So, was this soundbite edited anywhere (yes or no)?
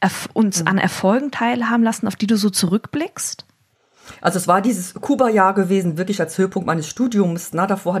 no